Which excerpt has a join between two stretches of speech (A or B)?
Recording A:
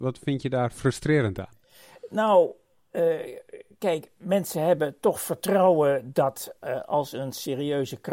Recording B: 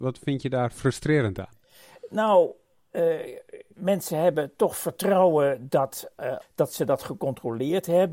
B